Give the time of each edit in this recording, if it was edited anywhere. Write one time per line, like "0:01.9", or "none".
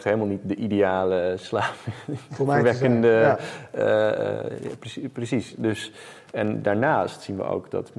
none